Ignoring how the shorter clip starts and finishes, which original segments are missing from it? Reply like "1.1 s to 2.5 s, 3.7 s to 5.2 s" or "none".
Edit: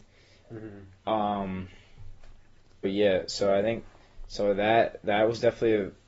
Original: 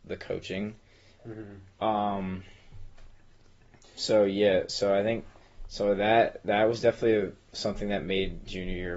3.6 s to 4.3 s